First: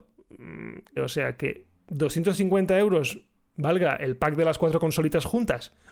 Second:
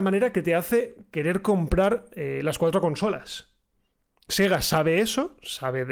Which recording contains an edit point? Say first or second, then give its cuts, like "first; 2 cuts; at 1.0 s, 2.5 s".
first; 1 cut; at 1.0 s